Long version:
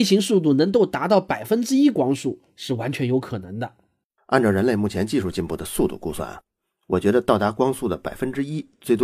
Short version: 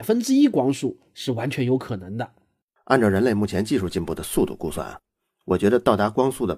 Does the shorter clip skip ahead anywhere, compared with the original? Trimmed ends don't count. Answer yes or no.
no